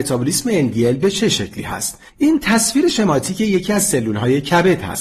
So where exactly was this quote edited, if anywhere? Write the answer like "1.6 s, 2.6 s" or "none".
2.1 s